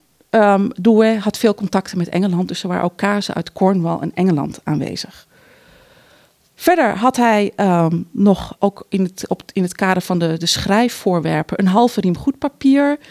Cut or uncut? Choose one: cut